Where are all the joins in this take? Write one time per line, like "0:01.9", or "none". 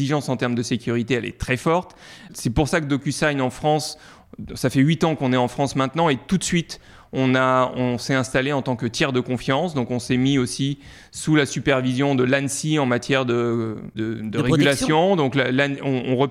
none

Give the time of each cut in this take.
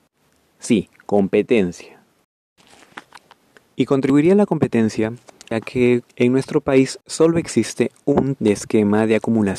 0:06.0
0:08.4

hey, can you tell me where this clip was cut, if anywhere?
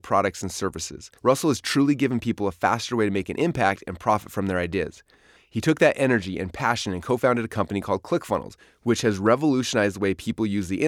0:01.2
0:05.4

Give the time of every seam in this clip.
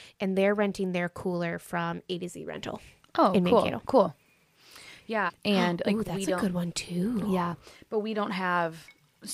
0:05.3

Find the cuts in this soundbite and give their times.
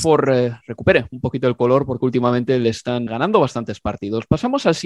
0:03.1

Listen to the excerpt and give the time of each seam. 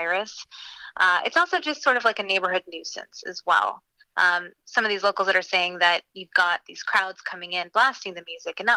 0:04.6

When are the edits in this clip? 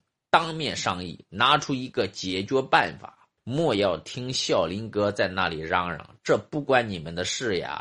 0:03.4

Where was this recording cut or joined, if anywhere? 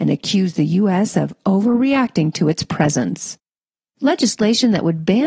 none

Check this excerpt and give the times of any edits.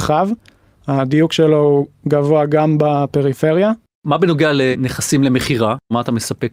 none

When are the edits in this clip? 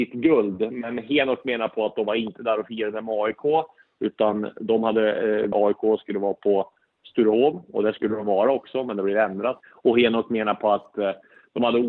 0:05.5
0:09.6

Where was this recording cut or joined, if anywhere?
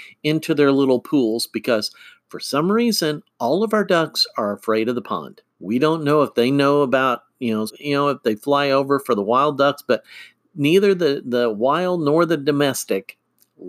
0:05.5
0:07.7

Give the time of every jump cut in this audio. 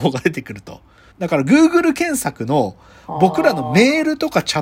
0:01.1

